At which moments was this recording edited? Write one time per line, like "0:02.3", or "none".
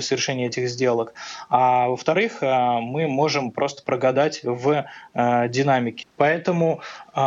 0:06.0